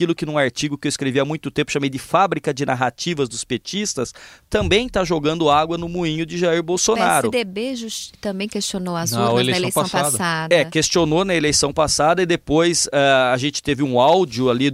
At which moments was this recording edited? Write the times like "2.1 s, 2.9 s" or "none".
none